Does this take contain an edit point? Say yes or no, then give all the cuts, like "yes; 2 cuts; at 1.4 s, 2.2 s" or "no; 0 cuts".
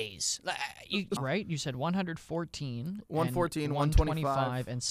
yes; 1 cut; at 1.2 s